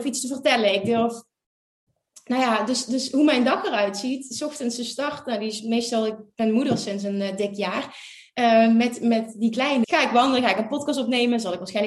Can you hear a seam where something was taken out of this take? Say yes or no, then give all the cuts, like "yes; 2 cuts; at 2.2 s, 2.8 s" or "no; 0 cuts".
yes; 1 cut; at 9.8 s